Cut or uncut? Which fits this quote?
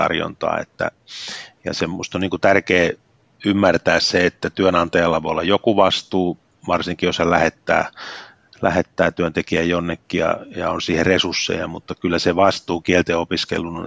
uncut